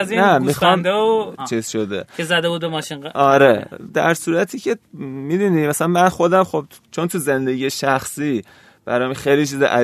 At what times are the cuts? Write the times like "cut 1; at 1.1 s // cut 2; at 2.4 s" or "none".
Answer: cut 1; at 1.4 s // cut 2; at 4.8 s